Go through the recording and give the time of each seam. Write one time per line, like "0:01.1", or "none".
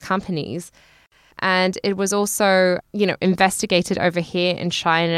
0:01.3
0:02.8